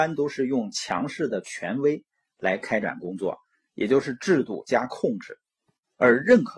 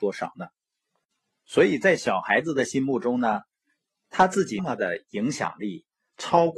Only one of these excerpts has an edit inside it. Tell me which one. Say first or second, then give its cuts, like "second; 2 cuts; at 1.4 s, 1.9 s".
second; 1 cut; at 4.6 s